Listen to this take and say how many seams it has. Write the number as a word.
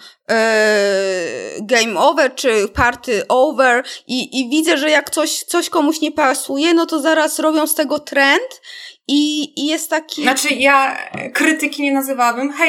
zero